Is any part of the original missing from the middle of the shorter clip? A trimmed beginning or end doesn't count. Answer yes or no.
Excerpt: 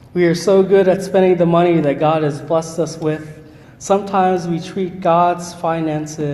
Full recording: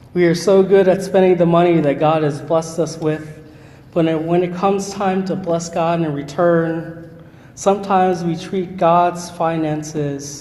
yes